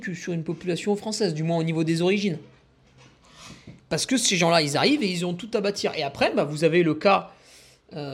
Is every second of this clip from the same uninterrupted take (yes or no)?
yes